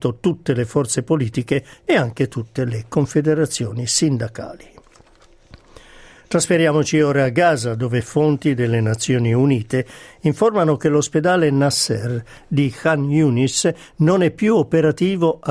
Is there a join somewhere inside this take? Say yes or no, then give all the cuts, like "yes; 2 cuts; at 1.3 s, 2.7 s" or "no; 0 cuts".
no; 0 cuts